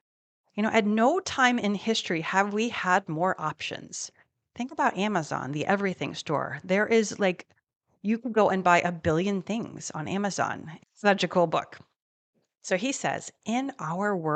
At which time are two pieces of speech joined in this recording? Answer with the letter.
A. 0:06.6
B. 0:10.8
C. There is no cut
B